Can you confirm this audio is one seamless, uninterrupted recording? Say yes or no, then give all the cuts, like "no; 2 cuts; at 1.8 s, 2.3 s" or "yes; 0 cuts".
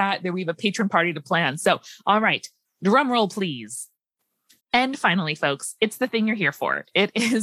no; 1 cut; at 4.6 s